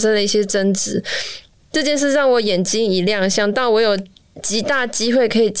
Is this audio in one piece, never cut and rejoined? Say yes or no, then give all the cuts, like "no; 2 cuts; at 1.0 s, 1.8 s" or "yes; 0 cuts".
yes; 0 cuts